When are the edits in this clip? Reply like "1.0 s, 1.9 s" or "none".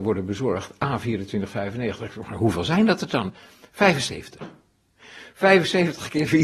none